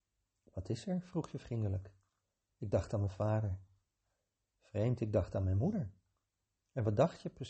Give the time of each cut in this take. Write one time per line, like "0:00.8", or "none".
none